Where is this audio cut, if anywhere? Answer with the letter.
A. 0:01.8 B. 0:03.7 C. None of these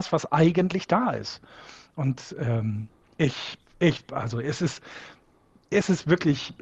B